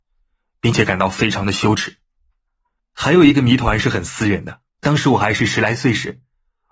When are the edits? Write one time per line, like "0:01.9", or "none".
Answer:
0:02.8
0:04.7